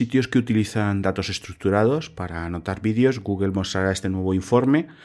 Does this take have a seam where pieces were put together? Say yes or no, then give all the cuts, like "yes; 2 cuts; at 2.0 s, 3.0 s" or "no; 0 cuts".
no; 0 cuts